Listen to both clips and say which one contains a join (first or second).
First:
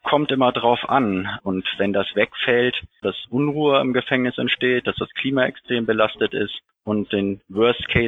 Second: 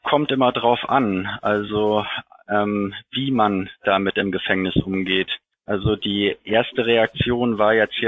first